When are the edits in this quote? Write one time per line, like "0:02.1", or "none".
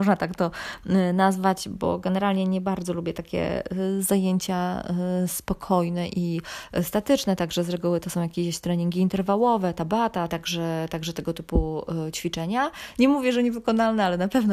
0:10.3
0:12.9